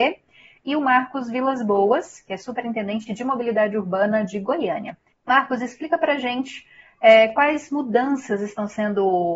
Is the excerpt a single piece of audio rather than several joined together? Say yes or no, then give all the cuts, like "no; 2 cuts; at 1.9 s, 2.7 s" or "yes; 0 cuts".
no; 1 cut; at 5.1 s